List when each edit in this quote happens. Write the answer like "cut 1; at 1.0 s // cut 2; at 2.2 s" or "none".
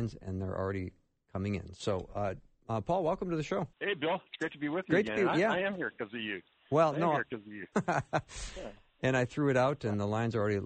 cut 1; at 3.7 s // cut 2; at 7.7 s